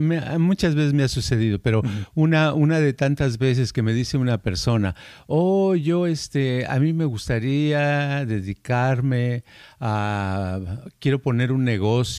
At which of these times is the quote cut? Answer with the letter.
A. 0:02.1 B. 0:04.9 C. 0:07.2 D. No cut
D